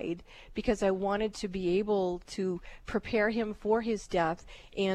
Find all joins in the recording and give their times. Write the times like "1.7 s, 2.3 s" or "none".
none